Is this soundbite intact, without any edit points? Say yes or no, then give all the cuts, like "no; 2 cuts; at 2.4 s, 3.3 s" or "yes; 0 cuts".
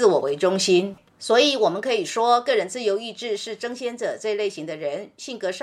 no; 1 cut; at 1.1 s